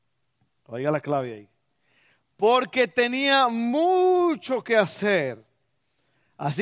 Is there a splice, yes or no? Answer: no